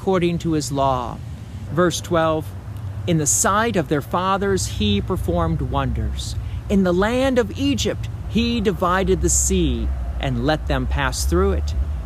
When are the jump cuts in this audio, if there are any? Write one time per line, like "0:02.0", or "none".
0:01.7
0:08.2